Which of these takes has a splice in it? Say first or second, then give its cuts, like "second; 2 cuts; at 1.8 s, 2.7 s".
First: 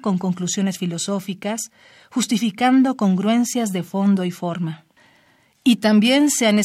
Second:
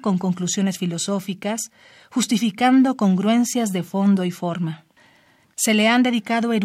second; 1 cut; at 5.4 s